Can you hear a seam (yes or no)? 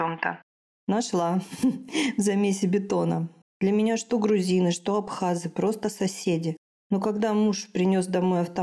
yes